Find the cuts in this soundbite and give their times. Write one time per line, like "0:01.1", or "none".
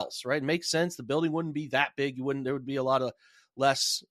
none